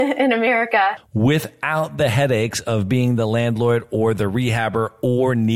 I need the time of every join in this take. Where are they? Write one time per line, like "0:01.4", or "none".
0:01.0